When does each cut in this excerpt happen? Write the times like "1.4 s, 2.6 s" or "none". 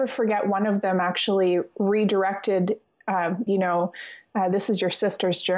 3.5 s